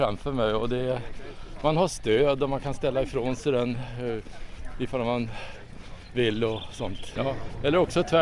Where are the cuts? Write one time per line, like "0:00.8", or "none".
0:07.2